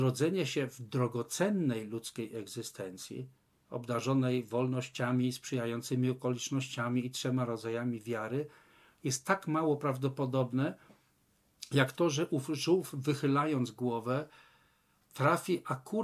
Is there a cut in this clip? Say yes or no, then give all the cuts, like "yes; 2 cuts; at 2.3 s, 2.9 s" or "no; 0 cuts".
no; 0 cuts